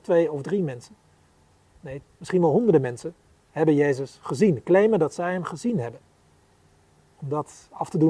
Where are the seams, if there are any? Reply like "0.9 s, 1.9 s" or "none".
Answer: 2.0 s